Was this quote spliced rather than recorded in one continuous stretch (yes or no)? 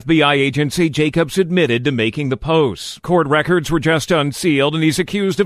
yes